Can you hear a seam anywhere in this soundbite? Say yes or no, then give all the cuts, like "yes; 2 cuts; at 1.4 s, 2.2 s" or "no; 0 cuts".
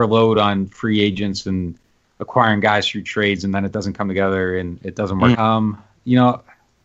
yes; 1 cut; at 5.3 s